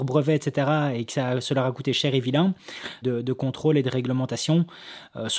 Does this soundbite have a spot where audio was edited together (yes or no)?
yes